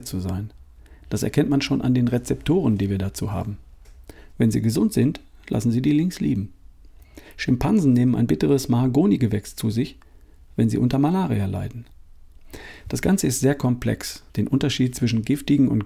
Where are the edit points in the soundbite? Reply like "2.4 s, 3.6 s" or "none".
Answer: 4.3 s, 14.3 s